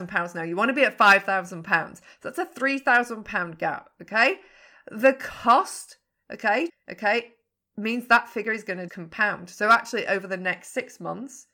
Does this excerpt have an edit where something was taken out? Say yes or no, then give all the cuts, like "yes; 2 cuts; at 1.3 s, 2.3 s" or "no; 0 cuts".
yes; 2 cuts; at 6.7 s, 8.9 s